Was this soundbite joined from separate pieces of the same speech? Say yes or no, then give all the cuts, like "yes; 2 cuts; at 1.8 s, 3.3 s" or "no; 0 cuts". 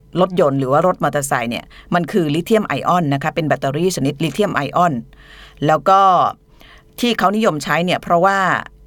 no; 0 cuts